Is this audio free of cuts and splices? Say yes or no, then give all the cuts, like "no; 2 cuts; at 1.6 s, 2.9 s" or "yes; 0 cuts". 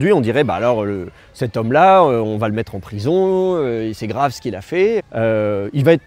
no; 1 cut; at 5.0 s